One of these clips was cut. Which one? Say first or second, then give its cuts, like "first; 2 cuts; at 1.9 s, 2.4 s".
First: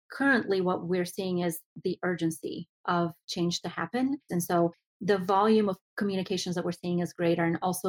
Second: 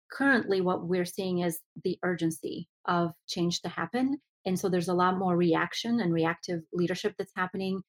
first; 1 cut; at 4.3 s